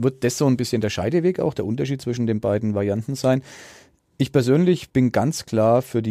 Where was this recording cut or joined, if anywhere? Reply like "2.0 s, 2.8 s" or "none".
4.9 s